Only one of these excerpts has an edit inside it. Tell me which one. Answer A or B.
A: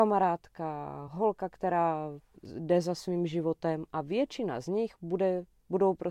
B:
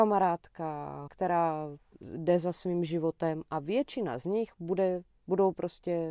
B